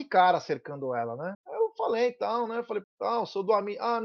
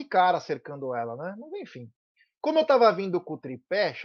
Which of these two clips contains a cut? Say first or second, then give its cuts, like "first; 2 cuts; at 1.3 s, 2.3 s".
first; 2 cuts; at 1.3 s, 2.8 s